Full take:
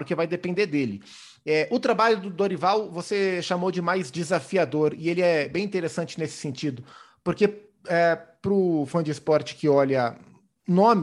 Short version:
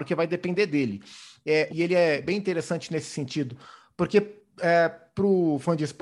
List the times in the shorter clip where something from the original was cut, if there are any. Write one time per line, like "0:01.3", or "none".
0:01.7